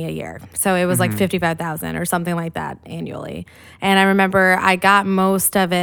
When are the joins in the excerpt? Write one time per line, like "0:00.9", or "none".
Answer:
none